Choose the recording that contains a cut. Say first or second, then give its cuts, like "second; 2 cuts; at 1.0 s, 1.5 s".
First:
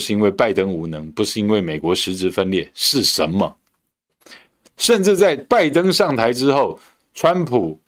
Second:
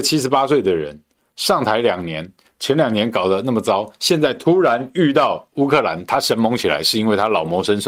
first; 1 cut; at 4.6 s